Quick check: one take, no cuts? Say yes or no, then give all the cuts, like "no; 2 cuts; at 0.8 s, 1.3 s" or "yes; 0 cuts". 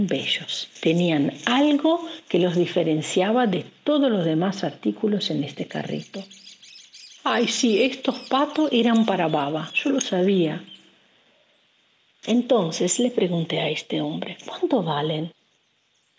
yes; 0 cuts